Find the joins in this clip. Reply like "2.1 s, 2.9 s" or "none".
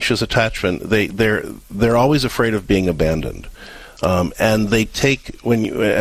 none